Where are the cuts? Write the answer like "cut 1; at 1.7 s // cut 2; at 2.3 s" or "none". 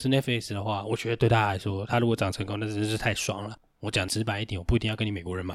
none